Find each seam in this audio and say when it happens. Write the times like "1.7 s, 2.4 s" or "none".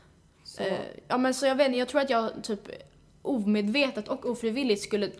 none